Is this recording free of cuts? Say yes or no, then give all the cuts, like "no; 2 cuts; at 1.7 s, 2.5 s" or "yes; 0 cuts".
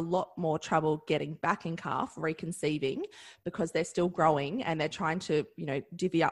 yes; 0 cuts